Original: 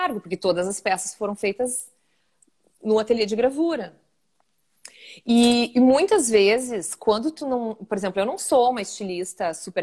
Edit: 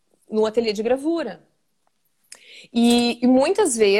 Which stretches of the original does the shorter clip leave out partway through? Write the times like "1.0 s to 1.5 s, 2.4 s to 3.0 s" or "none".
none